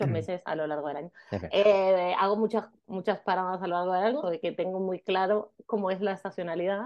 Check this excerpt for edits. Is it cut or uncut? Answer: cut